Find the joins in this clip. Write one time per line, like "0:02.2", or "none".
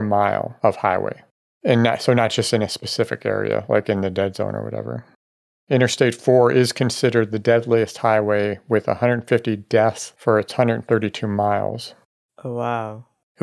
none